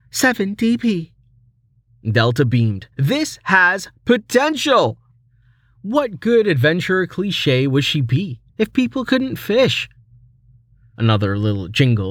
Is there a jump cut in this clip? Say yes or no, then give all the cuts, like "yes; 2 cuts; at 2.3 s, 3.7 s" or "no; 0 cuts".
yes; 2 cuts; at 2.9 s, 8.5 s